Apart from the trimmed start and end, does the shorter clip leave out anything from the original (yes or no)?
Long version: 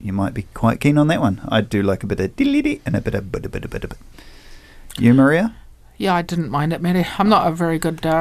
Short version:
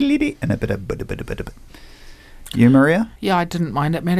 yes